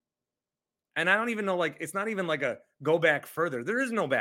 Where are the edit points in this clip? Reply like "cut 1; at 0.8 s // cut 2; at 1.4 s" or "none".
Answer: none

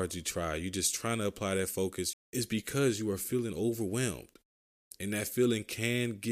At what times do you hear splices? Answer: cut 1; at 2.1 s

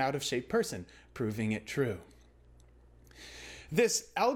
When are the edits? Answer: none

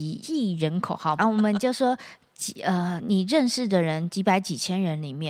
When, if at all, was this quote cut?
cut 1; at 1.2 s

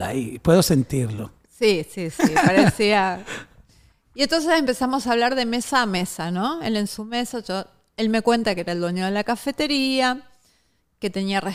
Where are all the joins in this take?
none

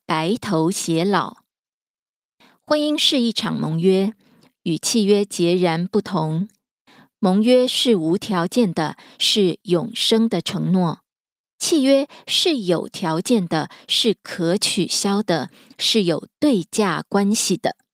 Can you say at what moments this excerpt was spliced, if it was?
none

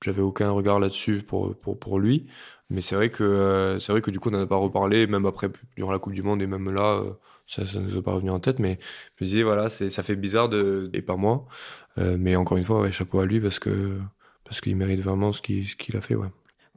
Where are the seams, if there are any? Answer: cut 1; at 10.9 s

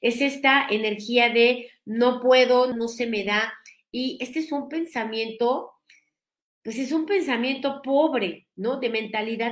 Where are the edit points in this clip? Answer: cut 1; at 2.7 s

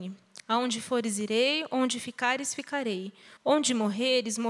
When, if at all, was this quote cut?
cut 1; at 3.4 s

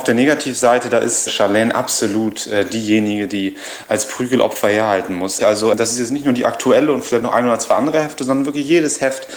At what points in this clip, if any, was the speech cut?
cut 1; at 1.3 s // cut 2; at 5.4 s

